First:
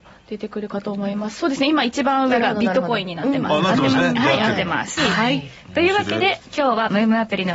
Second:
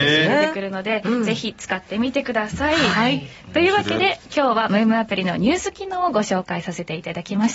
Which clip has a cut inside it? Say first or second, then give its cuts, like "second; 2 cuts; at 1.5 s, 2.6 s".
first; 1 cut; at 5.0 s